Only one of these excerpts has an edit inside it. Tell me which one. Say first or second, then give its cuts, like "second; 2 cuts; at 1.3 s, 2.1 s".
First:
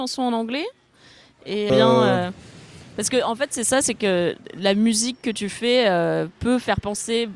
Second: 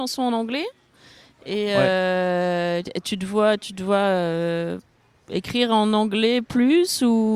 first; 1 cut; at 1.7 s